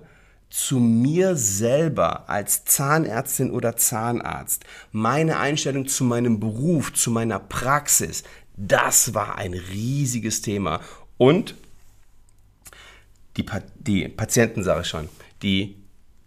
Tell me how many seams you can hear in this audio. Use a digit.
0